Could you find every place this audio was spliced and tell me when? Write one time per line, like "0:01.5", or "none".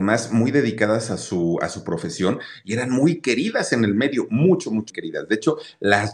0:04.9

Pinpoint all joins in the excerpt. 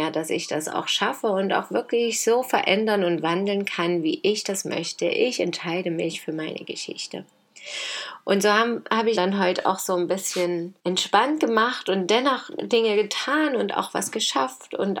0:09.2
0:10.8

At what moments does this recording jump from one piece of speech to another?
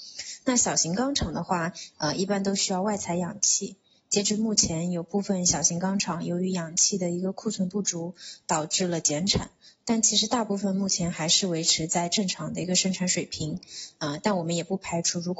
none

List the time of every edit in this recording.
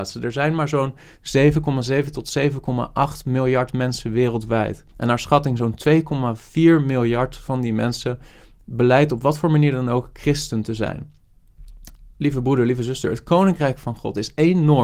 0:04.9

